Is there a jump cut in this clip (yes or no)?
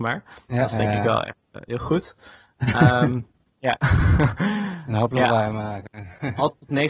yes